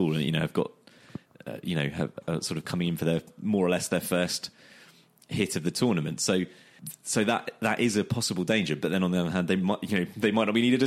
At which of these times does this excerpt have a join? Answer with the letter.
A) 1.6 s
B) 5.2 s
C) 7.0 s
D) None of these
D